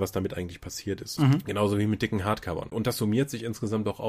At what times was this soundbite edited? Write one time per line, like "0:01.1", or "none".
0:01.2